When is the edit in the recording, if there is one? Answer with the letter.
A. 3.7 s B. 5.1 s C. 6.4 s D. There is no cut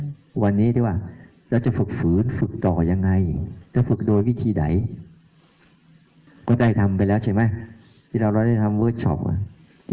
A